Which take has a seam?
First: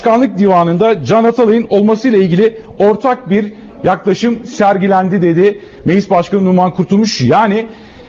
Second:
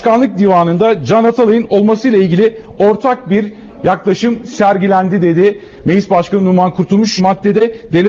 second; 1 cut; at 7.2 s

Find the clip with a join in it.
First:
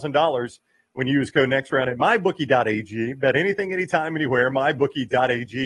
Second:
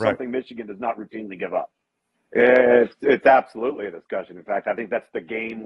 second; 1 cut; at 2.2 s

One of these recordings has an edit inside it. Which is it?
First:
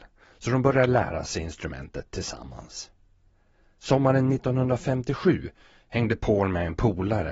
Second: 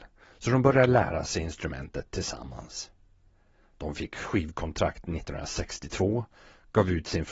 second; 1 cut; at 3.6 s

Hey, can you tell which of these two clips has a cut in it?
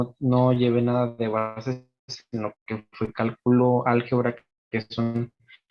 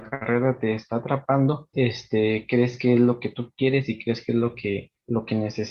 second; 1 cut; at 1.7 s

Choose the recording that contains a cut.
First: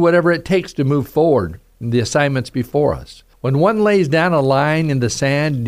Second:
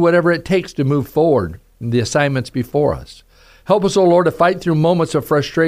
first; 1 cut; at 3.3 s

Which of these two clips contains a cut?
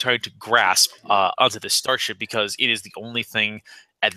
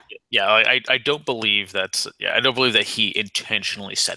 first; 1 cut; at 1.3 s

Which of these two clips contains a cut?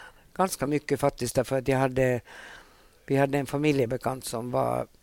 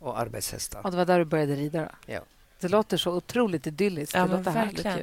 second; 1 cut; at 2.5 s

